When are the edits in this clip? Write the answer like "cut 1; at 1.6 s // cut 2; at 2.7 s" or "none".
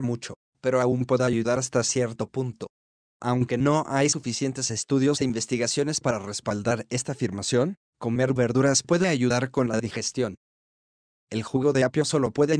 cut 1; at 3.1 s

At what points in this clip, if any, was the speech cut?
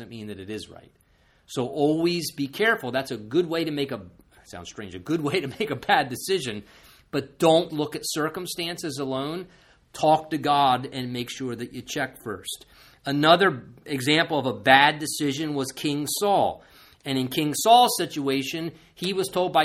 cut 1; at 7.7 s

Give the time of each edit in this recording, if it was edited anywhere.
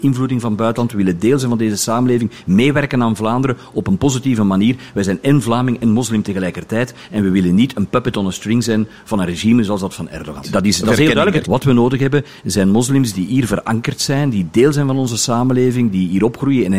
cut 1; at 10.4 s // cut 2; at 11.4 s

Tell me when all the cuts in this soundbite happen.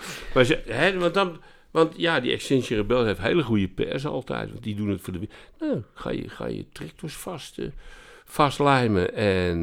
none

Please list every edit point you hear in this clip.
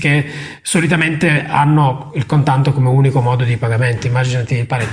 none

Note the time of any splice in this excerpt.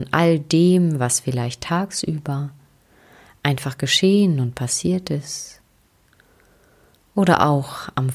none

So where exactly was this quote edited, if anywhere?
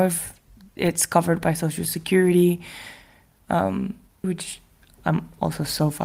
cut 1; at 4.2 s

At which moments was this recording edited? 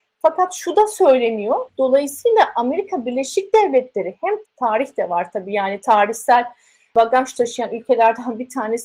cut 1; at 1.7 s // cut 2; at 4.4 s

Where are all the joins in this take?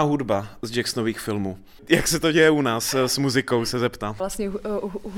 cut 1; at 1.8 s // cut 2; at 4.2 s

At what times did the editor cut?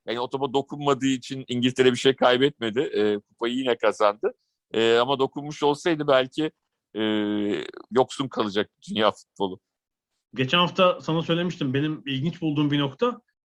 cut 1; at 7.9 s

